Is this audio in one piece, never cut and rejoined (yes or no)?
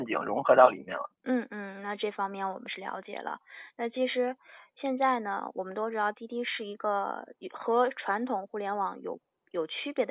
no